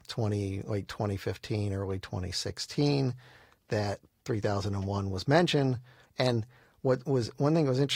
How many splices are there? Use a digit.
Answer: 1